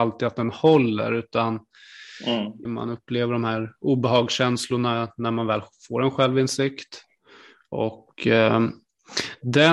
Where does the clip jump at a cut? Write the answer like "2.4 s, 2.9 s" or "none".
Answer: 2.7 s